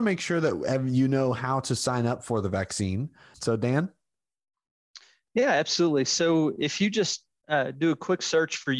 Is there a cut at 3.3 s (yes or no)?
yes